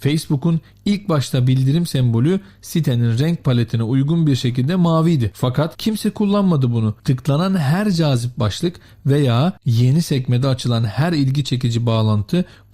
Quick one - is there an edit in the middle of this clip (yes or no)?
yes